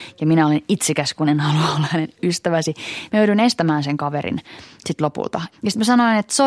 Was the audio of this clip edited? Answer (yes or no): yes